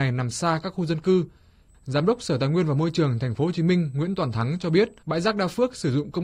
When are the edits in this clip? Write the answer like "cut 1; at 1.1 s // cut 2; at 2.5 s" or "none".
cut 1; at 1.7 s // cut 2; at 5.0 s